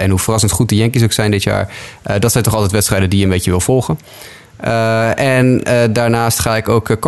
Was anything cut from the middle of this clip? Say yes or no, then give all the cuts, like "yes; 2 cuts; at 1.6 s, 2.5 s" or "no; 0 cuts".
no; 0 cuts